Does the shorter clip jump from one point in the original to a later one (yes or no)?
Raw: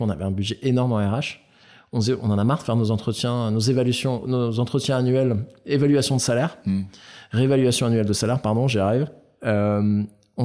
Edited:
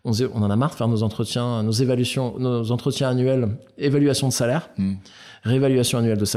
no